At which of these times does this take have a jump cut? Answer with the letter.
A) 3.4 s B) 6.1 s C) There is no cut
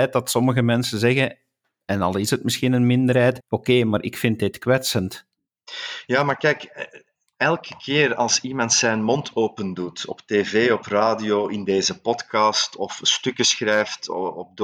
A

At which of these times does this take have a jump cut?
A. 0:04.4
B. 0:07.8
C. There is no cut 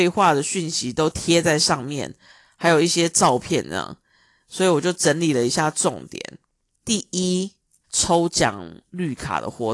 B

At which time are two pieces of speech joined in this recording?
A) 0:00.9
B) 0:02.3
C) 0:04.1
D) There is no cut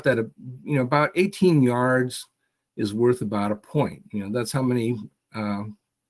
D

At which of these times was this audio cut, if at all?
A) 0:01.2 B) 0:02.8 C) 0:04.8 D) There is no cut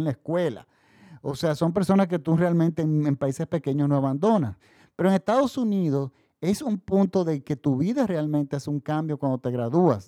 D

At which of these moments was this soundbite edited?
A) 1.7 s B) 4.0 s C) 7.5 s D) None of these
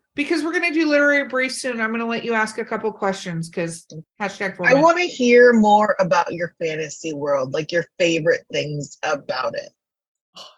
B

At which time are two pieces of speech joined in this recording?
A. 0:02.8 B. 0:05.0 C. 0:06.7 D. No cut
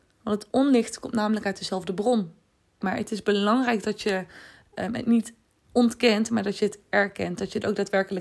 A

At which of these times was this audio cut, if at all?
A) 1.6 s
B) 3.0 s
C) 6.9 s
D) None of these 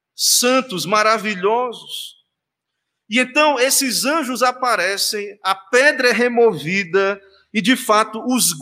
D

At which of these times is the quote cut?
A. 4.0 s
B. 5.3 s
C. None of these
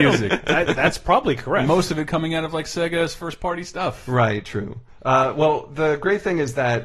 C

